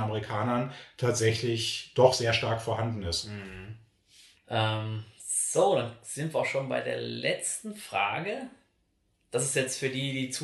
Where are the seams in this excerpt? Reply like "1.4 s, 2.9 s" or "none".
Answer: 4.4 s